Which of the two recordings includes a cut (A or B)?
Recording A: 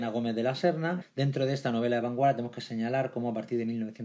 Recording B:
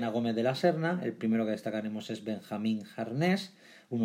A